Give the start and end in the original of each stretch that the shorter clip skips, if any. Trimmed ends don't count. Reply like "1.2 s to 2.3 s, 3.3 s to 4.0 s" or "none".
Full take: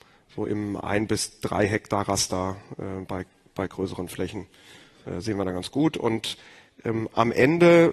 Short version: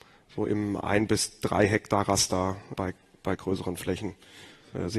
2.7 s to 3.1 s